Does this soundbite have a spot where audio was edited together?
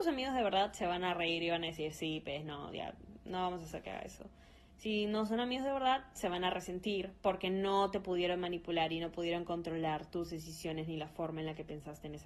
no; 0 cuts

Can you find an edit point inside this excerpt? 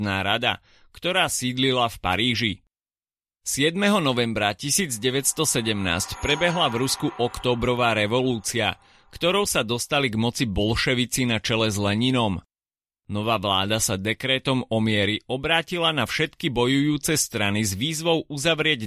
no; 0 cuts

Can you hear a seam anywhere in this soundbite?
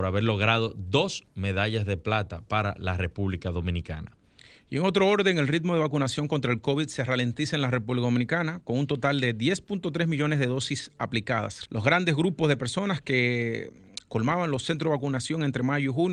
yes; 1 cut; at 11.7 s

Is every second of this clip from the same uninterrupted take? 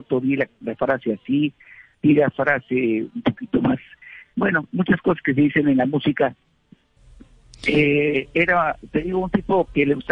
yes; 0 cuts

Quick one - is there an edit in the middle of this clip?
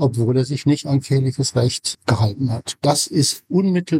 no; 0 cuts

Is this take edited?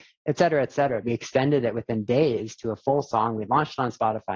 yes; 1 cut; at 1.0 s

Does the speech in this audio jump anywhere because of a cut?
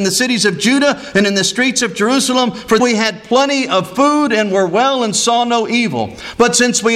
yes; 1 cut; at 2.8 s

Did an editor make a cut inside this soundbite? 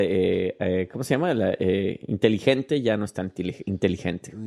no; 0 cuts

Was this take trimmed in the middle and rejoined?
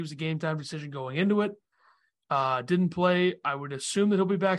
no; 0 cuts

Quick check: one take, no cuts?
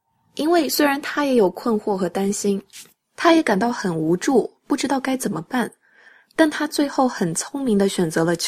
yes; 0 cuts

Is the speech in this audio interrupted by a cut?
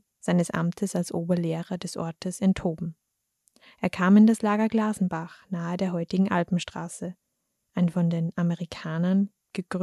no; 0 cuts

